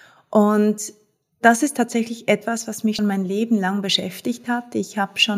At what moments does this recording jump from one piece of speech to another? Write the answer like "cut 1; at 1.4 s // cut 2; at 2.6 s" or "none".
cut 1; at 3.0 s

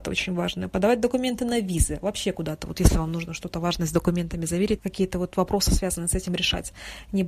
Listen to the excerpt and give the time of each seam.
cut 1; at 4.8 s

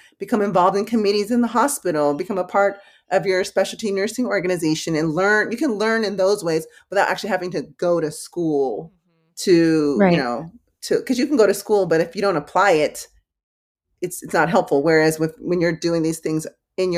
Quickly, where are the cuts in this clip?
none

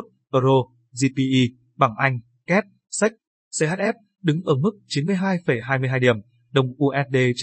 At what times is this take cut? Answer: none

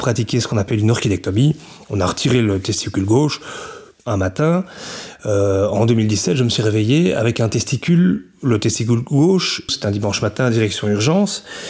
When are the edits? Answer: cut 1; at 4.0 s // cut 2; at 9.7 s

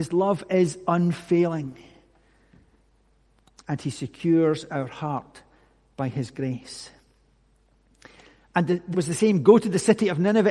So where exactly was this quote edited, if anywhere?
cut 1; at 8.9 s

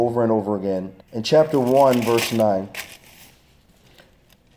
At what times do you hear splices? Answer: cut 1; at 1.0 s

